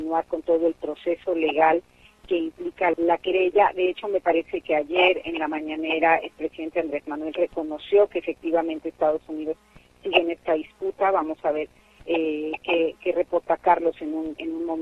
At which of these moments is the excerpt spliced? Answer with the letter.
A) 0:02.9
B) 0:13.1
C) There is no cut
A